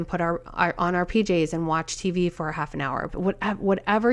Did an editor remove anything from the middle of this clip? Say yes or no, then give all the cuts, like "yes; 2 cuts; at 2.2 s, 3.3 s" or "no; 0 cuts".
yes; 1 cut; at 3.1 s